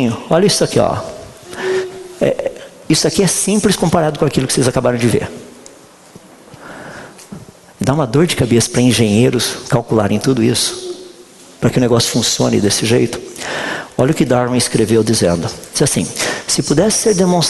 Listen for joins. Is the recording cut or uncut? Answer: uncut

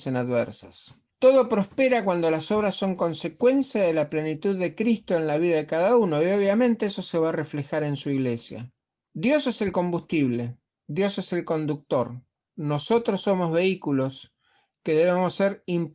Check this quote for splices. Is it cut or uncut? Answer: uncut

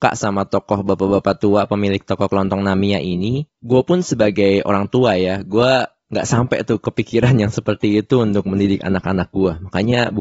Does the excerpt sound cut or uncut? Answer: cut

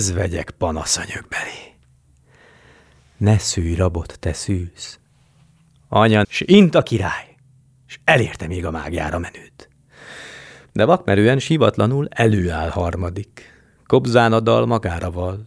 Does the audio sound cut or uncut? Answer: cut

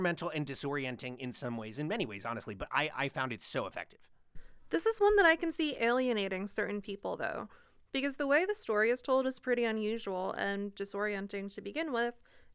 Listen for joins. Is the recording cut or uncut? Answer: uncut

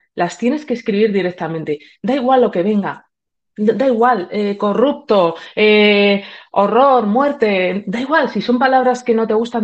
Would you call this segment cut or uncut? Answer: uncut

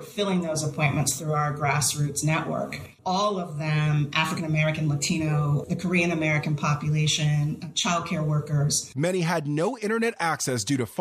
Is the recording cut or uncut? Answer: uncut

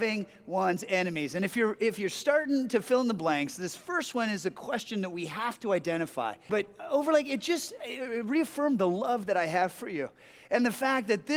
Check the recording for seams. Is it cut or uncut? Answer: cut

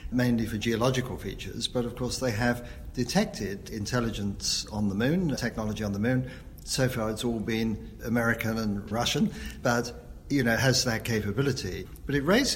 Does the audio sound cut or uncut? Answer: cut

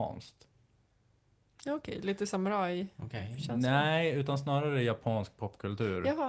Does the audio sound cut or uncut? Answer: uncut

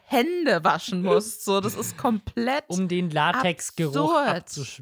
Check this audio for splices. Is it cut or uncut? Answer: uncut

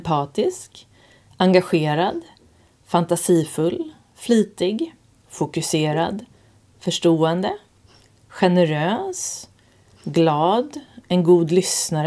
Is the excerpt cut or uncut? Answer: uncut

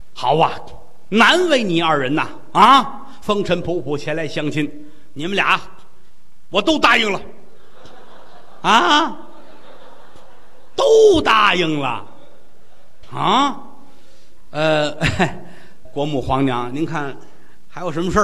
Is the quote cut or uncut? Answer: cut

